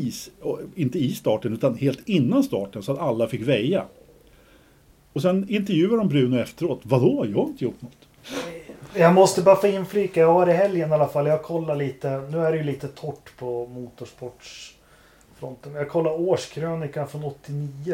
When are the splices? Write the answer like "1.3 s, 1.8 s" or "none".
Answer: 8.2 s